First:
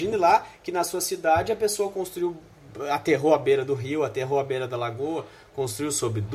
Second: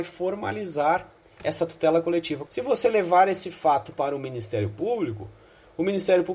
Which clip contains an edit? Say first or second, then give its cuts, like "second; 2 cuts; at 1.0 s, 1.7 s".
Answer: second; 1 cut; at 2.5 s